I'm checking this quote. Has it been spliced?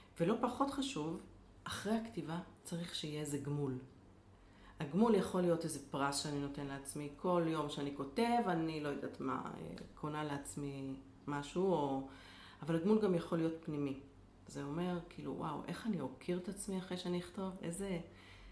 no; 0 cuts

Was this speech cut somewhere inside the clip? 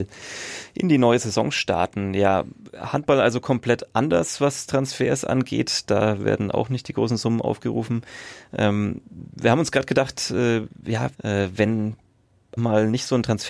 yes; 2 cuts; at 11.1 s, 12.6 s

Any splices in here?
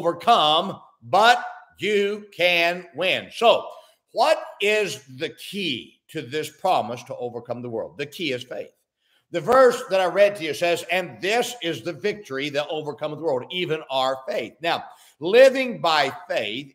no; 0 cuts

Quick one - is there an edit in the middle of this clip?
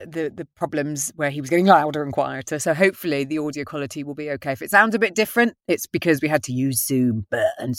no; 0 cuts

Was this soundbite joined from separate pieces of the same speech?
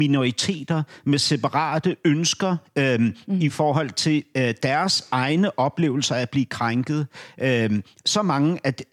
no; 0 cuts

